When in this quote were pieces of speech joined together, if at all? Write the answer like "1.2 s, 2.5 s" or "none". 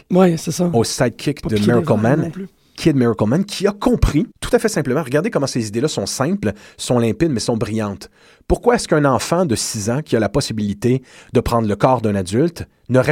4.3 s